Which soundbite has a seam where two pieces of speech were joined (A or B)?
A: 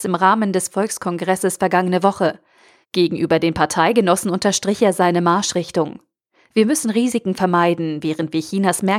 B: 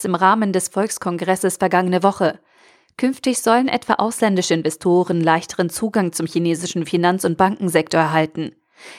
A